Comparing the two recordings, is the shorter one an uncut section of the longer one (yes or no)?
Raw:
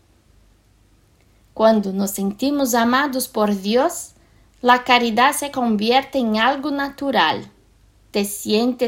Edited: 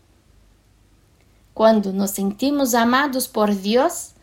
yes